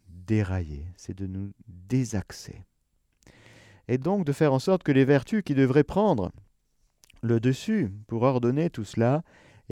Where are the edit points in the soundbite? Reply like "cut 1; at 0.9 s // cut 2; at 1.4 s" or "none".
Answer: none